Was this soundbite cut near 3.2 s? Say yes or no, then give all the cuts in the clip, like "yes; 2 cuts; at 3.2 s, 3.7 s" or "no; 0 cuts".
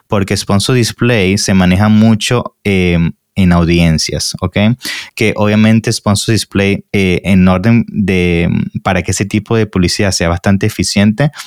no; 2 cuts; at 5.1 s, 6.9 s